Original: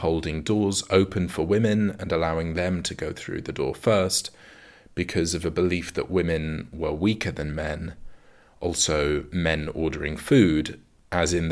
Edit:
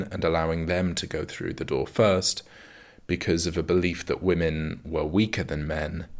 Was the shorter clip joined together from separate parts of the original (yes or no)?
no